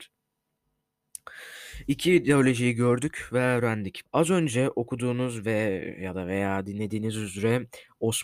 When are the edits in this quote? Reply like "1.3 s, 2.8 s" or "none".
4.0 s